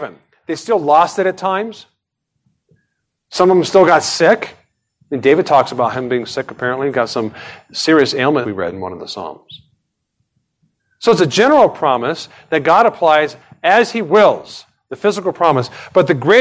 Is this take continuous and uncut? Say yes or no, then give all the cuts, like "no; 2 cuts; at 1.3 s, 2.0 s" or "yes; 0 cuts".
no; 1 cut; at 8.4 s